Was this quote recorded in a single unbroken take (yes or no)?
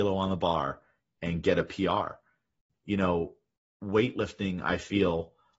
no